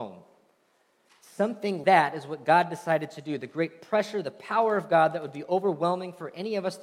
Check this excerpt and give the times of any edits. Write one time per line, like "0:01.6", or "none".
0:01.8